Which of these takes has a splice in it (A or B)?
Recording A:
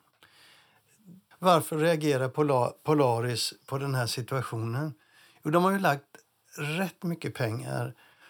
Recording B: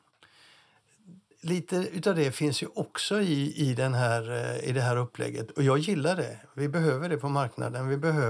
A